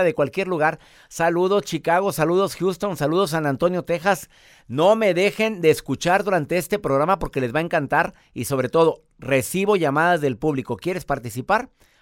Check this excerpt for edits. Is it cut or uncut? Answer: uncut